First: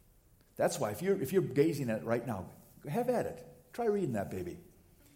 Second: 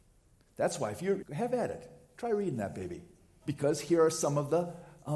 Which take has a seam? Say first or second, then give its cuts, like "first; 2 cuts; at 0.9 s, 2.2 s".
second; 2 cuts; at 1.2 s, 3.4 s